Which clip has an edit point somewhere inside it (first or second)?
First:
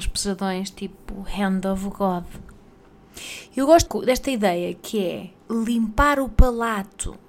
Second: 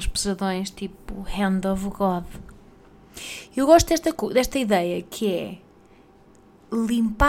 first